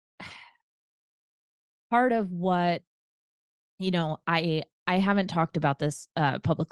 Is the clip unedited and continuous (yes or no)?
yes